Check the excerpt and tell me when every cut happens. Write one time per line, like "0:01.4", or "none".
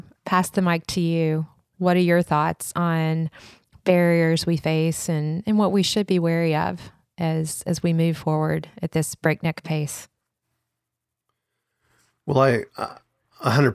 none